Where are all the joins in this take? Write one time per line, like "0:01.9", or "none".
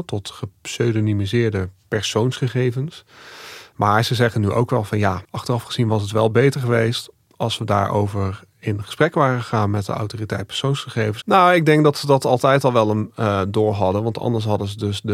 0:03.7
0:05.2
0:11.2

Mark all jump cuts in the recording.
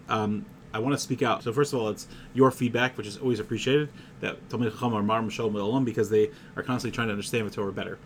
0:01.4

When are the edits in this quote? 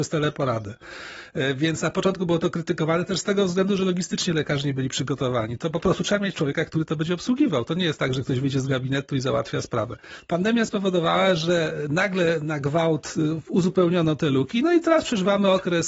none

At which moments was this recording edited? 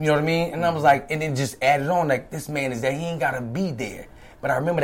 none

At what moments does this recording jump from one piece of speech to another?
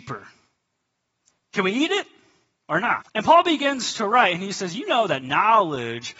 0:03.0

